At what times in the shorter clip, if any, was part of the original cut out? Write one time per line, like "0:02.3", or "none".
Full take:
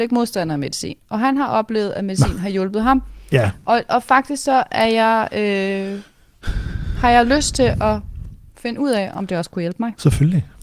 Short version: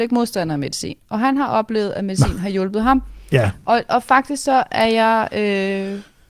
none